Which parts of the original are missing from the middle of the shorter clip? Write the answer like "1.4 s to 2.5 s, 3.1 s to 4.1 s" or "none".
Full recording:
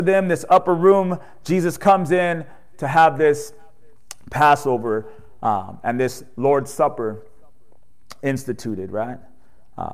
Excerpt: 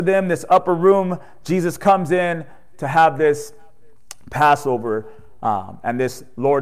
none